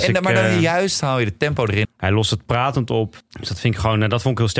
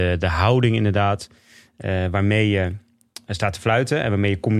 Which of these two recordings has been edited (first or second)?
first